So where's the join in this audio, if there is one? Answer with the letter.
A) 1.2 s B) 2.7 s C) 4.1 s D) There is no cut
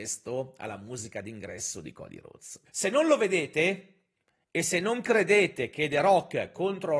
B